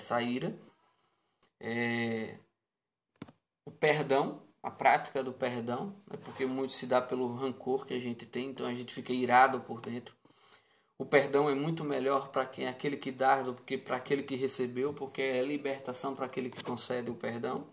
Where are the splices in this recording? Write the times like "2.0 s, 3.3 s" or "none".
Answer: none